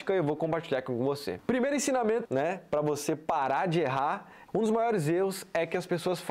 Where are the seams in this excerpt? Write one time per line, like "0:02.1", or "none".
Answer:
0:02.2
0:04.5